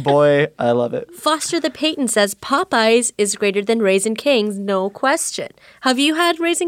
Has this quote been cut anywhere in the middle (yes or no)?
no